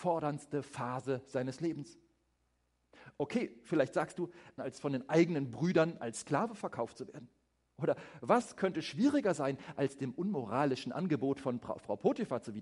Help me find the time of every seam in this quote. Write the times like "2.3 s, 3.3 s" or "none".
4.6 s